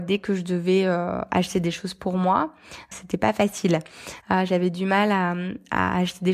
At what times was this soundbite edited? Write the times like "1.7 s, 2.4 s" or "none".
2.9 s, 4.2 s